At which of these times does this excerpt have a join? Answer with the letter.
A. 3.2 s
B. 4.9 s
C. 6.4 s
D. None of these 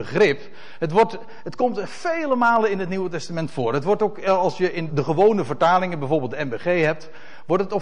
B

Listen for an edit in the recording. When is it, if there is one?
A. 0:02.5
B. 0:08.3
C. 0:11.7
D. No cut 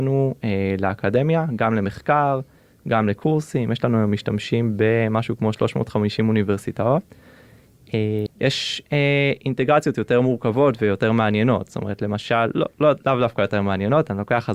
B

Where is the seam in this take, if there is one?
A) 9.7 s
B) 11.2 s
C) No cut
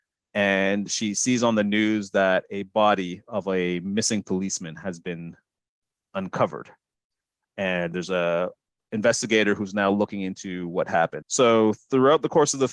B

